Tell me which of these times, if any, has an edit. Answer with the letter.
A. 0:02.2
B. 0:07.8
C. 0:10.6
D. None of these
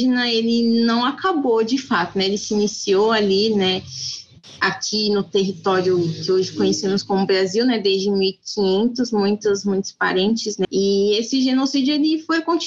C